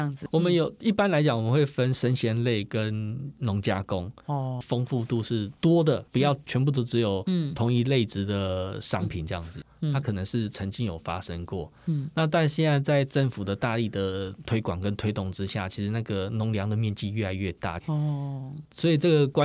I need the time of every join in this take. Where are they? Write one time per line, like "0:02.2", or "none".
0:04.6
0:09.6
0:17.8